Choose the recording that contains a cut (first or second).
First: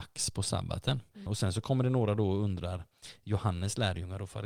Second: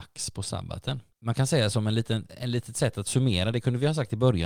first